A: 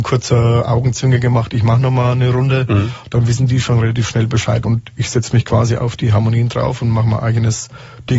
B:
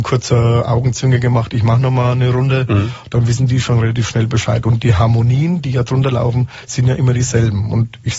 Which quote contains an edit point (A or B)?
A